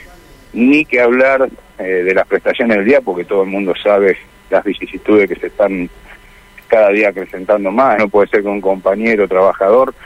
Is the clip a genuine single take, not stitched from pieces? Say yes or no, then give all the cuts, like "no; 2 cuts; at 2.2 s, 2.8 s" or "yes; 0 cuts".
no; 1 cut; at 8.0 s